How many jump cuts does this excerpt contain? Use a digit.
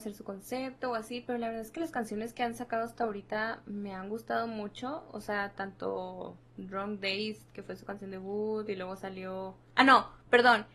0